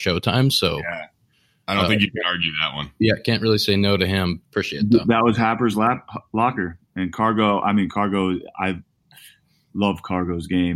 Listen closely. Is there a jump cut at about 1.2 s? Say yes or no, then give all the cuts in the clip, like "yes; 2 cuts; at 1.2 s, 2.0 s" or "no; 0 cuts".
no; 1 cut; at 4.4 s